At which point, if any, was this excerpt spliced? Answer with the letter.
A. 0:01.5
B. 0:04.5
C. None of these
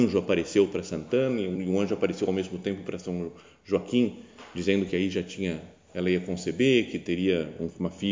A